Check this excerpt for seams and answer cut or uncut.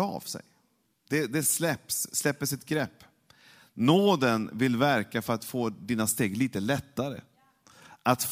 uncut